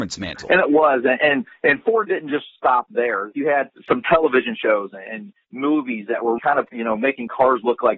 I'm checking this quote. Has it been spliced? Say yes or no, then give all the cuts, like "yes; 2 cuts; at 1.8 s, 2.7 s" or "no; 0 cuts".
yes; 2 cuts; at 3.3 s, 6.4 s